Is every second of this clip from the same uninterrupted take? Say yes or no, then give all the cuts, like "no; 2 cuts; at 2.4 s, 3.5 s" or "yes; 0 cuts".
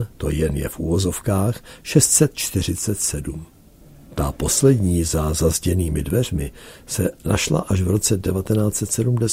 yes; 0 cuts